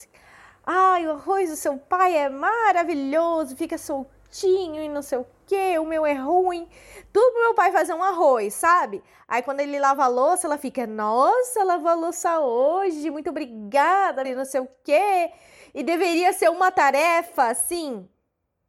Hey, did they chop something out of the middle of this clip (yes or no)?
yes